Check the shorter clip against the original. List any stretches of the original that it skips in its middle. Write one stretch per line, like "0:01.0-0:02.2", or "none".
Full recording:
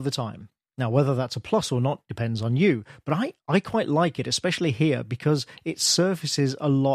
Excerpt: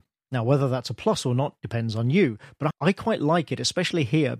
0:03.2-0:03.4